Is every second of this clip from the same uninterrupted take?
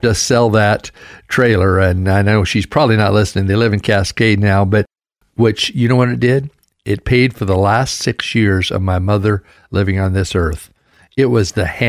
no; 1 cut; at 5.2 s

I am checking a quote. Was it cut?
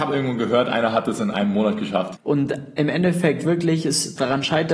yes; 1 cut; at 2.1 s

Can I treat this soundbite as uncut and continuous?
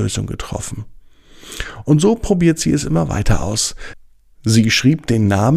yes; 0 cuts

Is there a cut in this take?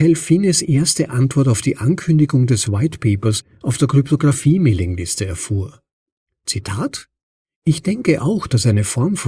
no; 0 cuts

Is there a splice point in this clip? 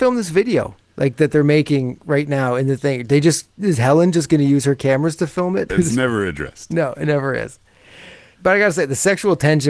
yes; 2 cuts; at 5.7 s, 8.4 s

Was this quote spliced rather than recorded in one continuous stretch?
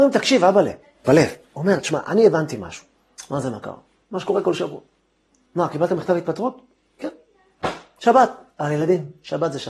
yes; 2 cuts; at 1.0 s, 3.2 s

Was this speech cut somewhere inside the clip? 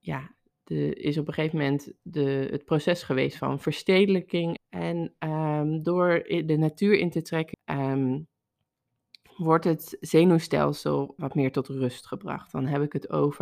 yes; 3 cuts; at 4.6 s, 7.5 s, 11.2 s

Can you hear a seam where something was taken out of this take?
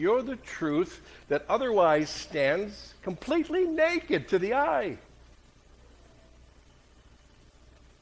no; 0 cuts

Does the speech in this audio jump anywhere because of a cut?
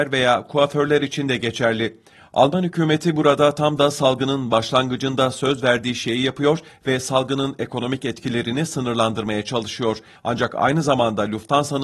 yes; 1 cut; at 10.2 s

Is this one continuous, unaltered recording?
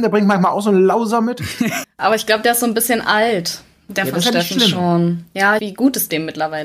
no; 2 cuts; at 1.8 s, 5.6 s

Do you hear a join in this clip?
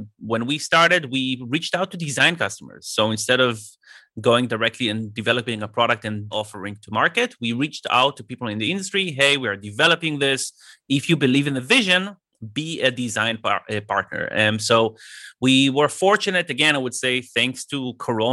yes; 1 cut; at 6.3 s

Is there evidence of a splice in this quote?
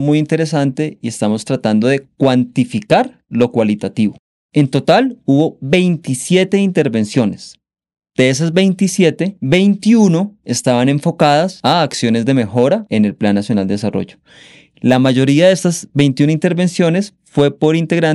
no; 0 cuts

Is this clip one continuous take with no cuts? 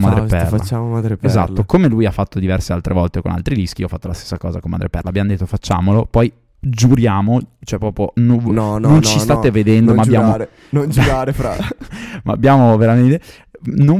yes; 0 cuts

